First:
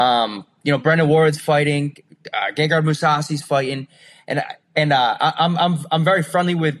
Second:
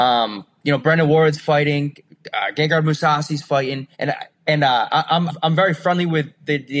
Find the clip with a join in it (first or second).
second